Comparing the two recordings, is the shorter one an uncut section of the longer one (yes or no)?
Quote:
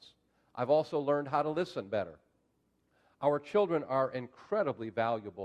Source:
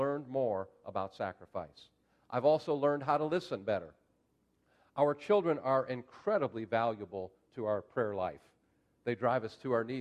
yes